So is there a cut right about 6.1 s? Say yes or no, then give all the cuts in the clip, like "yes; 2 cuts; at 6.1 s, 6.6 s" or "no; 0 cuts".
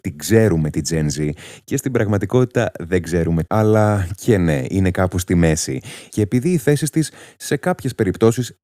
yes; 2 cuts; at 3.5 s, 6.1 s